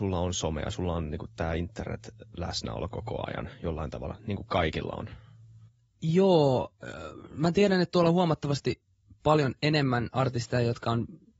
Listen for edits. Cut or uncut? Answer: uncut